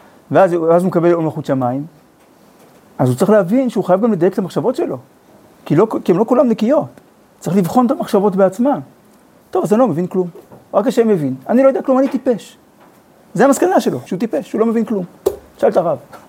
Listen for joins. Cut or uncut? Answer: cut